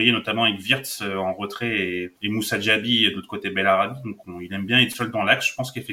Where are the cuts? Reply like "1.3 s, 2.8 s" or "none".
2.2 s